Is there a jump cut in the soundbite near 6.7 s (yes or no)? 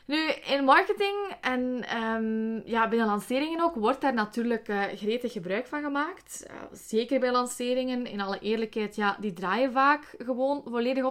no